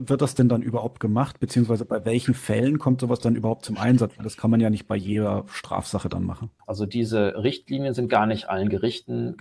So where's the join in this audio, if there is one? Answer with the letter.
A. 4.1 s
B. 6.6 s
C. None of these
B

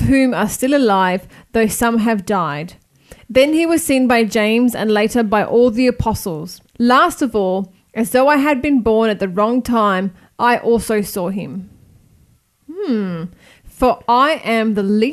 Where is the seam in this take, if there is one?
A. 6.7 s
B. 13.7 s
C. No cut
A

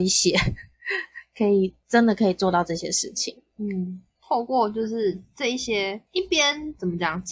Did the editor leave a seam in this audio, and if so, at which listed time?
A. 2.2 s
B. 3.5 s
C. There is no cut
C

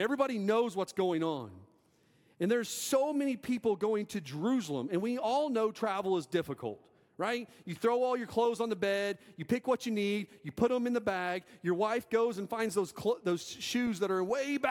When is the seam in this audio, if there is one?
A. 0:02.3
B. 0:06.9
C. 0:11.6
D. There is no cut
D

